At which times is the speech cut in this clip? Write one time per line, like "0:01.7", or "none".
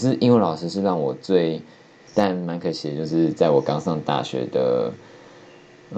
0:02.1